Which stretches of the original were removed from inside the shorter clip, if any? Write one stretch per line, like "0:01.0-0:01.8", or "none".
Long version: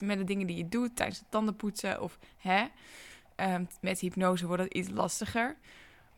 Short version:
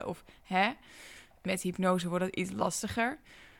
0:03.4-0:03.8

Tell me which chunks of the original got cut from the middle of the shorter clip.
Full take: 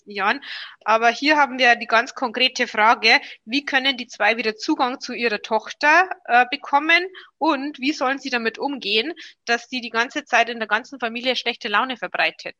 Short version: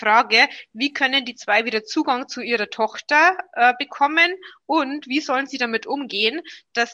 none

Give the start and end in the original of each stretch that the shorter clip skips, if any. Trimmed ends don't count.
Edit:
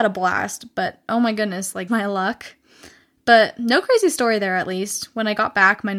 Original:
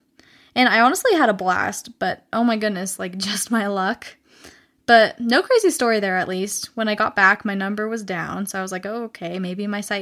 0:03.1-0:03.5

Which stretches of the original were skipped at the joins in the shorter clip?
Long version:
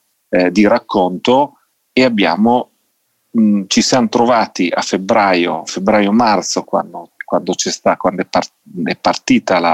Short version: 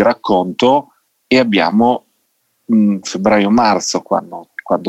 0:03.7-0:05.6

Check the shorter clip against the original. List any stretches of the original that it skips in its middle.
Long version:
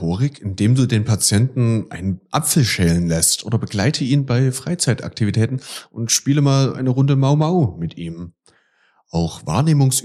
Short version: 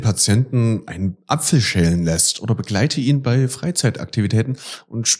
none

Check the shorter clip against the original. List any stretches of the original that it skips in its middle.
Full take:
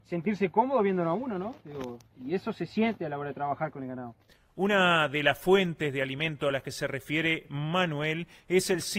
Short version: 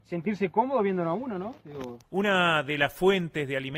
0:02.0-0:04.5

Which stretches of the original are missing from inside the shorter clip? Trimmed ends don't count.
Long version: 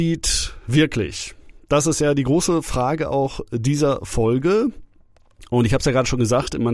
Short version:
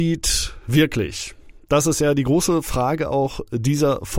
none

